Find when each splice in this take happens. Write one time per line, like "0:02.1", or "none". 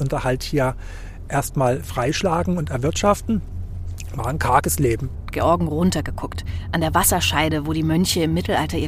0:05.3